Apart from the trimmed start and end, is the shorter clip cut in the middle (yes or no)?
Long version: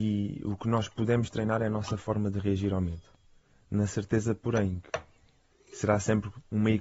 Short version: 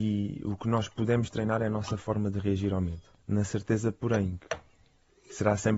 yes